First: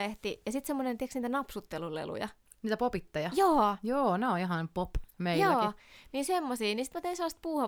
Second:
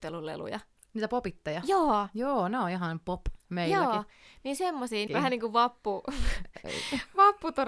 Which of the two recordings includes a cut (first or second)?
second